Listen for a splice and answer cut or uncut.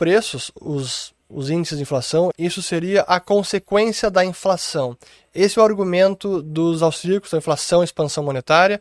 cut